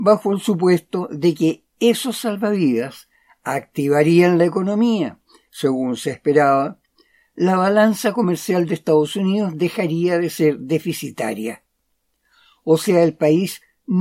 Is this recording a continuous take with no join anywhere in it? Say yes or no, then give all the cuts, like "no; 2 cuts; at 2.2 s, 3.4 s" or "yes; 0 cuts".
no; 1 cut; at 5.5 s